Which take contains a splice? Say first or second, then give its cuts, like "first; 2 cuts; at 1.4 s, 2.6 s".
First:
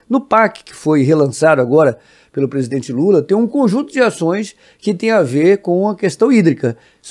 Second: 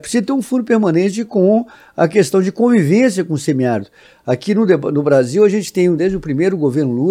second; 1 cut; at 6.0 s